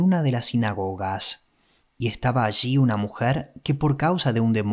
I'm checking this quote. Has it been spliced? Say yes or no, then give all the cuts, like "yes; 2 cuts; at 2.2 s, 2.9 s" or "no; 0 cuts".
no; 0 cuts